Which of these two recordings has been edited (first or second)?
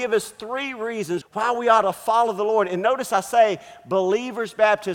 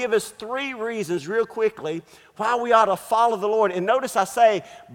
first